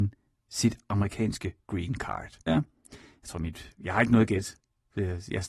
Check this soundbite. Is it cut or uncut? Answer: cut